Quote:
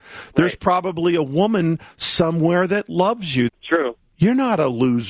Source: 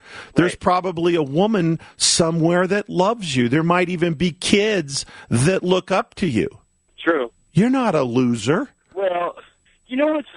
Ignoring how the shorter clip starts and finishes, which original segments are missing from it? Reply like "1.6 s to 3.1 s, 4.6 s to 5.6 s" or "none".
3.5 s to 6.8 s